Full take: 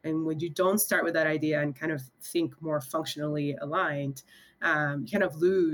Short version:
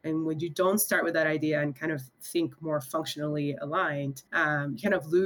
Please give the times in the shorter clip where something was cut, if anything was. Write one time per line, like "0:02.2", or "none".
0:04.3